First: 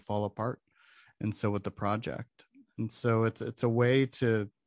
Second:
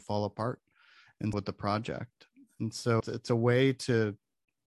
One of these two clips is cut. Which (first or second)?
second